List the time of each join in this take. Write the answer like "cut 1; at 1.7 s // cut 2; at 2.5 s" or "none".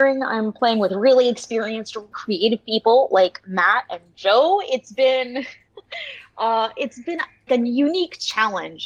cut 1; at 2.1 s // cut 2; at 7.5 s